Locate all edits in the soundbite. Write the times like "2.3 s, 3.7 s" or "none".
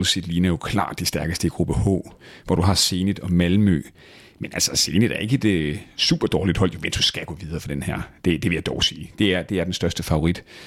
none